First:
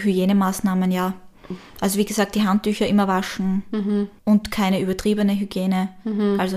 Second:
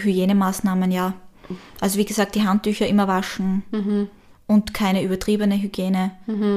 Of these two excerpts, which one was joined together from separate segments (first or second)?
first